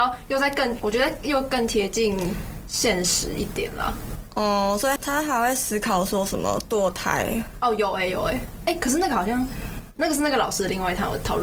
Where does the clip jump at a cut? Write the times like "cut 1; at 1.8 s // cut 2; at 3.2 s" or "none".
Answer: cut 1; at 5.0 s